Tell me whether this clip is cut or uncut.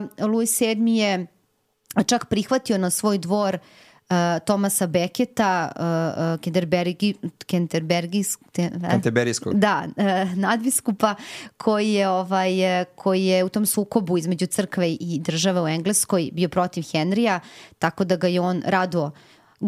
uncut